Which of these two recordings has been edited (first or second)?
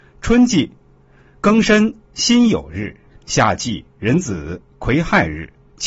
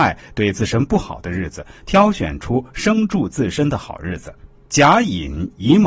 second